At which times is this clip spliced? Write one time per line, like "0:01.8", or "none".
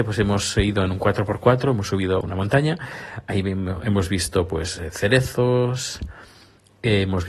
0:02.2